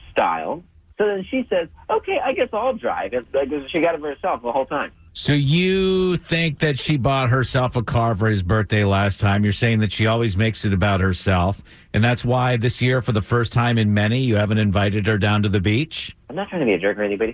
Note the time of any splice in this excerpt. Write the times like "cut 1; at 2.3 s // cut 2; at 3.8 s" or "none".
none